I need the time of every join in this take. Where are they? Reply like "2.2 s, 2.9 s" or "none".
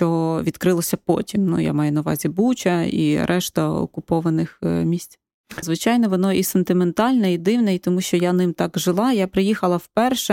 5.6 s